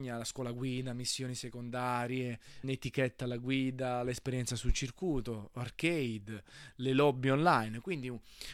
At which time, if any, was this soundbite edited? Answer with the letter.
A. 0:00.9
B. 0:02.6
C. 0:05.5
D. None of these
B